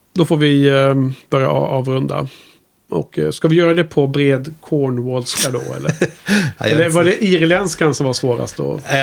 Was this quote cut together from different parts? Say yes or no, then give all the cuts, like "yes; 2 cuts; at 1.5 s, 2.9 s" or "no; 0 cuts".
no; 0 cuts